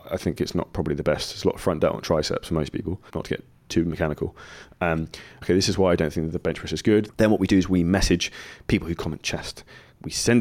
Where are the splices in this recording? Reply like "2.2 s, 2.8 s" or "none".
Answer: 3.1 s, 5.4 s, 7.1 s